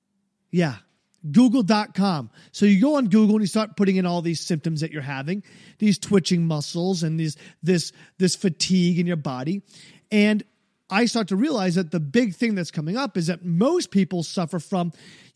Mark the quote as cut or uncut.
uncut